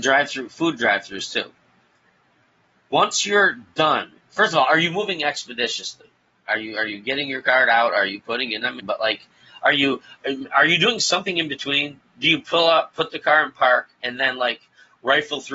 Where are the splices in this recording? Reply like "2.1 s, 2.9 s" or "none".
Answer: 8.8 s